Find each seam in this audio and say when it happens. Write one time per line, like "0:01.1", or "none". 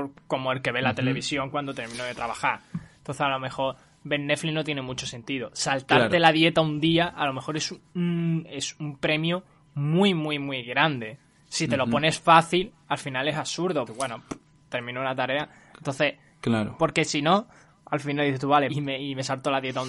0:13.9
0:16.8
0:18.7

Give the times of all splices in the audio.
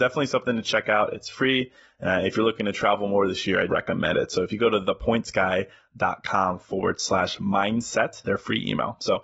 0:03.7
0:08.2

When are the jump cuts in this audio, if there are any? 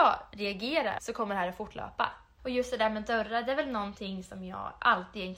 0:01.0
0:02.4

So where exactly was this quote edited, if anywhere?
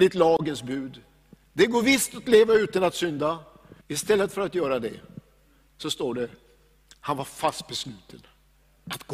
0:03.8

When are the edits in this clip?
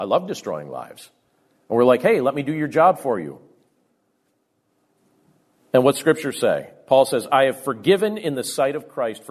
none

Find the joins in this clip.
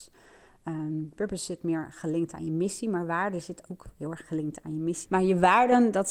0:05.1

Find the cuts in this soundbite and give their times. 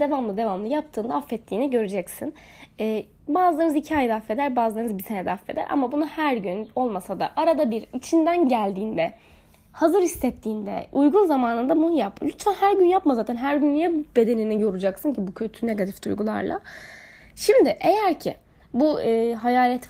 none

